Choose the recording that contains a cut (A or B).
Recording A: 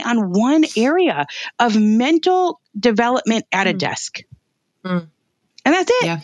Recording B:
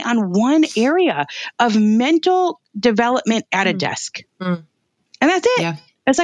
B